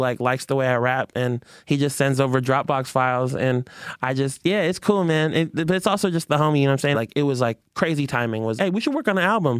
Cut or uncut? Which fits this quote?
cut